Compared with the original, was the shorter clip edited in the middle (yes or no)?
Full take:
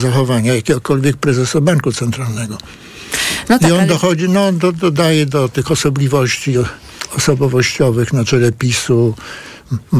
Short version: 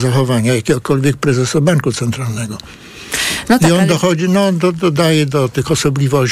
no